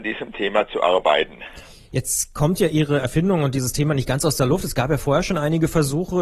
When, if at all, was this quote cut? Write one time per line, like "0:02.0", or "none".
none